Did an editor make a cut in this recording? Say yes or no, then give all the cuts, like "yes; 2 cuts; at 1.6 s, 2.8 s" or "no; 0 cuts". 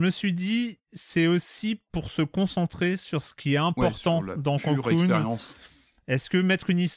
no; 0 cuts